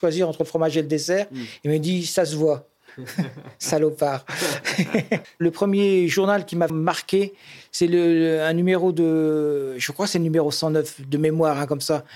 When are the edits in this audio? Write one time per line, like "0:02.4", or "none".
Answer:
0:05.2
0:06.7